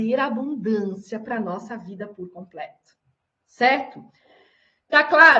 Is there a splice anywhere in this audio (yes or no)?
no